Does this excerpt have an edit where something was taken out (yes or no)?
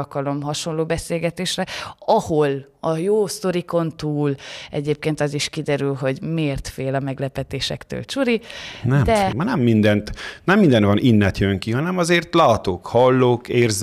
yes